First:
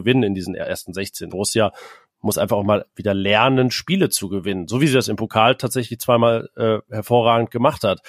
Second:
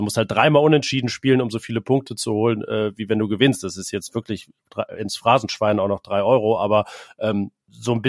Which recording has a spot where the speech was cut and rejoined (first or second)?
first